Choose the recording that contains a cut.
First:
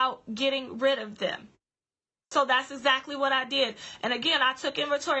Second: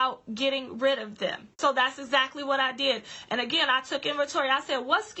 second; 1 cut; at 1.5 s

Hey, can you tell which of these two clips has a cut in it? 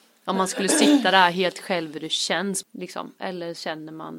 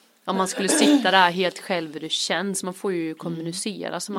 first; 1 cut; at 2.6 s

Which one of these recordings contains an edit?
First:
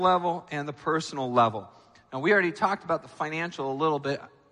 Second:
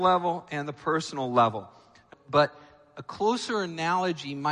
second; 1 cut; at 2.1 s

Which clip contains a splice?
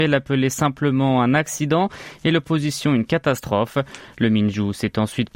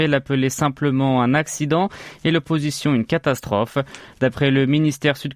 second; 1 cut; at 4.1 s

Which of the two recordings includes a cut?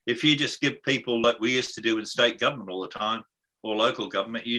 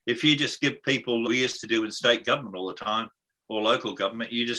second; 1 cut; at 1.2 s

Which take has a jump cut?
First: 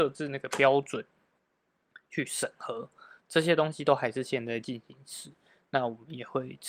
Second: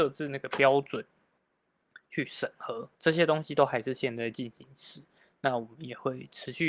second; 1 cut; at 3.0 s

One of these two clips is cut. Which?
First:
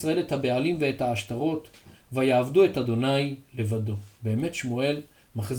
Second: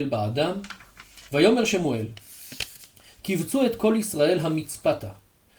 second; 1 cut; at 1.3 s

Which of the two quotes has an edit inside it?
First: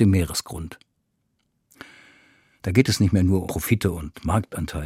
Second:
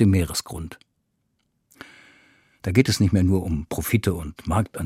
first; 1 cut; at 3.4 s

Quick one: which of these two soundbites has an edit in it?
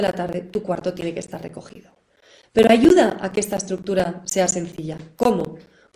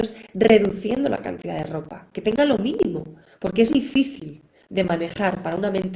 second; 1 cut; at 3.7 s

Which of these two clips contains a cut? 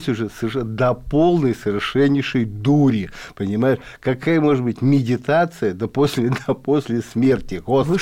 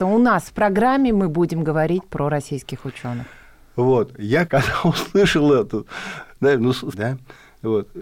second; 2 cuts; at 4.5 s, 6.9 s

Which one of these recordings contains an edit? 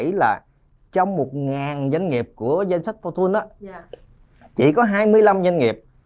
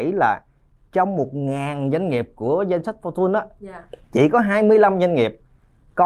second; 1 cut; at 4.0 s

